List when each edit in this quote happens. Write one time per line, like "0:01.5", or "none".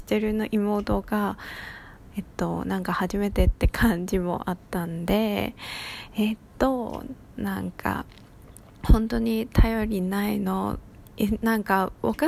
0:02.1